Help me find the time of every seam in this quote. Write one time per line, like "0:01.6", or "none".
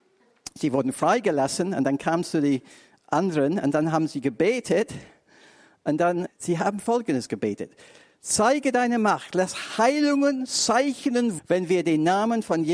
0:06.3
0:11.4

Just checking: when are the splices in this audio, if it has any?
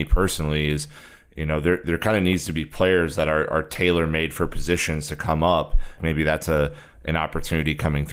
0:06.0

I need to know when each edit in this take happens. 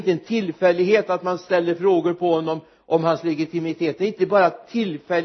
none

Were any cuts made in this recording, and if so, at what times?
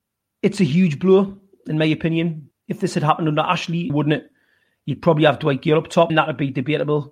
0:02.5
0:03.9
0:06.1

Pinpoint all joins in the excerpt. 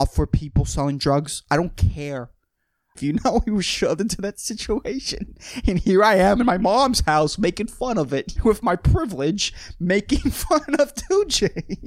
0:02.9
0:08.4

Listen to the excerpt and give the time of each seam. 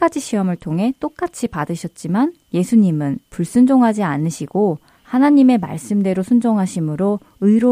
none

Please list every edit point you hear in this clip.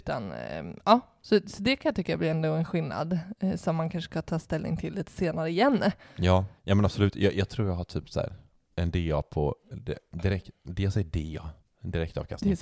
0:06.6

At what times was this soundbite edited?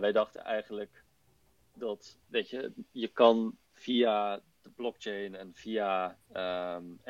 0:02.3
0:03.7

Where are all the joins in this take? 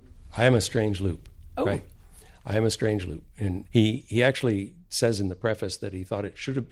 0:03.6

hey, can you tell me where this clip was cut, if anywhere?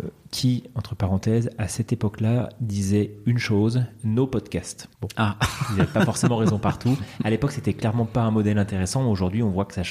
0:04.9

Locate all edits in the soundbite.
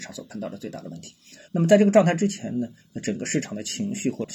0:01.5

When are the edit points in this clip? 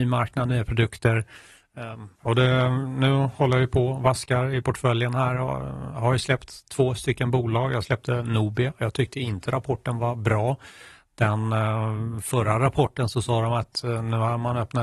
0:02.2

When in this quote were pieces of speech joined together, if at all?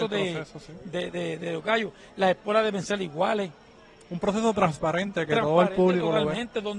none

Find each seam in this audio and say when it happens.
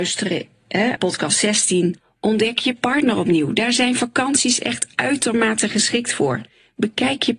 0:01.0

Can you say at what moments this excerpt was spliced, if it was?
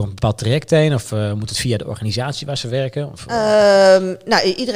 none

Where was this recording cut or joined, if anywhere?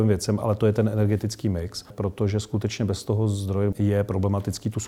0:01.9
0:03.7

